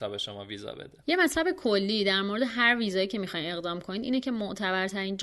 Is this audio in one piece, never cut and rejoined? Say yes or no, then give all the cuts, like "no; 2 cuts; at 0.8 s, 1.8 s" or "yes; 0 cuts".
no; 1 cut; at 1.0 s